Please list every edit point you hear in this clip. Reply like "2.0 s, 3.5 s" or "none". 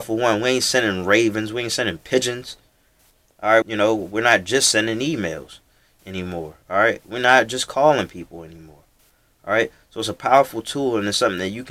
3.6 s